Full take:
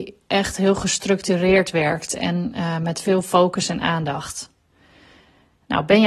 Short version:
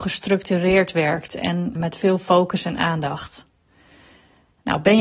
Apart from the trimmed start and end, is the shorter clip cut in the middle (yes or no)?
yes